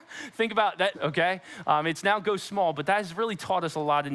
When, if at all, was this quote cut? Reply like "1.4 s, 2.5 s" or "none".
0.9 s